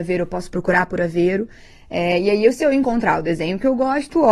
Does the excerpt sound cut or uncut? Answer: uncut